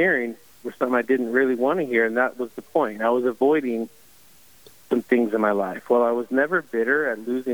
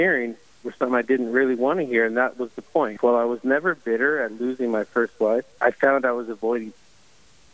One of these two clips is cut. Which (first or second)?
second